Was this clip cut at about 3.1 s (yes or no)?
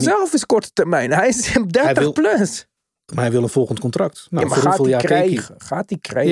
yes